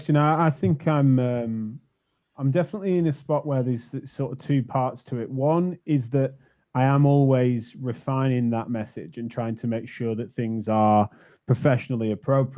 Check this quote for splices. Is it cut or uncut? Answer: uncut